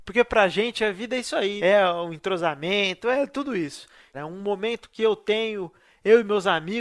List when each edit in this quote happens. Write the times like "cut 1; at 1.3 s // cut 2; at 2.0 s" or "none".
cut 1; at 1.6 s // cut 2; at 4.1 s